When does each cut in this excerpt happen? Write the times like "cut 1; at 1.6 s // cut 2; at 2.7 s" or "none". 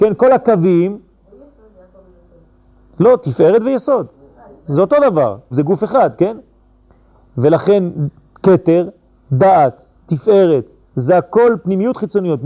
cut 1; at 5.5 s // cut 2; at 10.9 s